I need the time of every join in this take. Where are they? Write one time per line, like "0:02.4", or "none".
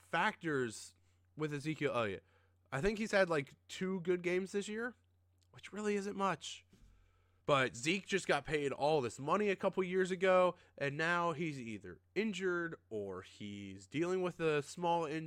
0:07.4